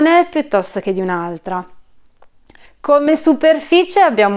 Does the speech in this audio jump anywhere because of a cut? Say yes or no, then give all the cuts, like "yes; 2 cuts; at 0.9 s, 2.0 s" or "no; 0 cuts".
yes; 1 cut; at 2.7 s